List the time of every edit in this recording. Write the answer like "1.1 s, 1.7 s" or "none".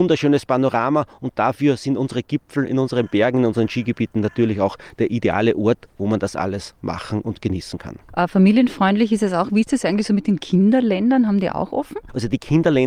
none